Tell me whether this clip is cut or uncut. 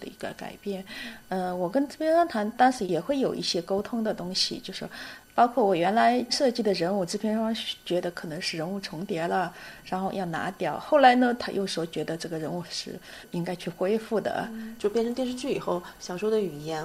uncut